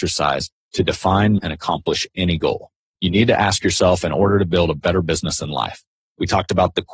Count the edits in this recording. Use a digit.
2